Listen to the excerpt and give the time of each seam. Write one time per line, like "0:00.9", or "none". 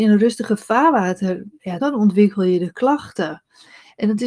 0:01.8